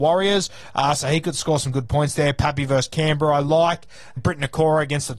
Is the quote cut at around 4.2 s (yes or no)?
yes